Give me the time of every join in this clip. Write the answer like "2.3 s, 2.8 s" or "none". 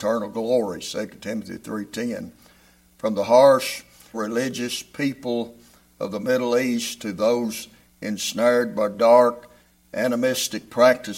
4.1 s